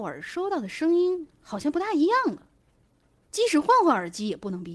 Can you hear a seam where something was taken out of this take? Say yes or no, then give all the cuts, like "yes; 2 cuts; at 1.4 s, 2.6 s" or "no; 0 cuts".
no; 0 cuts